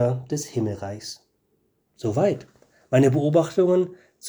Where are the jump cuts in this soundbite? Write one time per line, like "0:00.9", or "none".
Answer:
0:01.8